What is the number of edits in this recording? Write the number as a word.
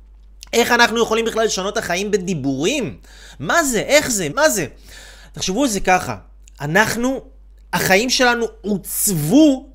one